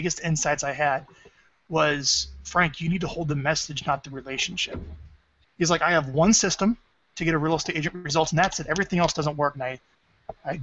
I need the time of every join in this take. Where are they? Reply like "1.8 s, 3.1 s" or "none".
5.4 s, 9.5 s